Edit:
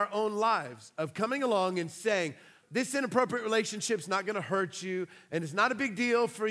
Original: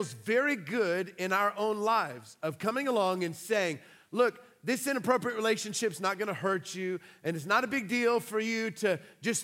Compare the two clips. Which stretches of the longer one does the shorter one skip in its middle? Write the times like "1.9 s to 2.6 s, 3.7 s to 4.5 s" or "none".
4.1 s to 4.6 s